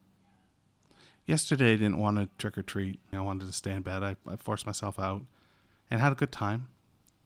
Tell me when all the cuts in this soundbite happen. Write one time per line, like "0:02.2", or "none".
0:03.1